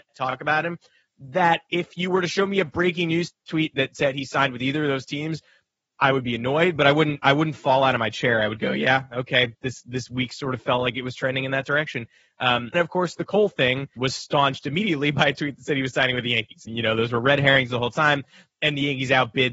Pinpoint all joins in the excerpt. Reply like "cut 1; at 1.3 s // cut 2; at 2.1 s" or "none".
cut 1; at 12.7 s // cut 2; at 14.0 s // cut 3; at 16.7 s